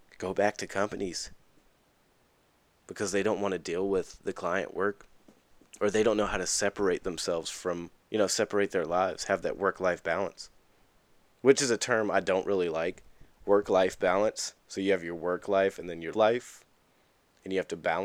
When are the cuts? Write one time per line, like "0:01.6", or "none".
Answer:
0:08.0
0:14.6
0:16.1